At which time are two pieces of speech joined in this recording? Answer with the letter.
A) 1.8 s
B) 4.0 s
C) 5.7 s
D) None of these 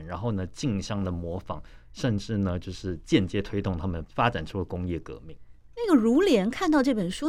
B